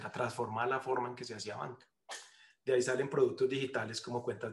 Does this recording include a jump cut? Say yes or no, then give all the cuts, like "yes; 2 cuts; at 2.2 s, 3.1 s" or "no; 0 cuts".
no; 0 cuts